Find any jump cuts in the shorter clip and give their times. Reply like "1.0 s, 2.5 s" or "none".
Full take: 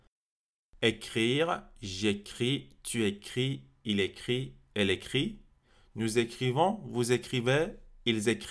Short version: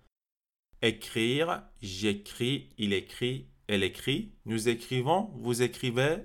2.7 s, 4.4 s